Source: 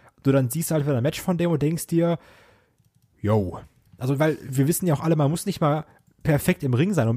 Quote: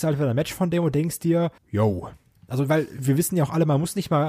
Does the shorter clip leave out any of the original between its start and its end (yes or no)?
yes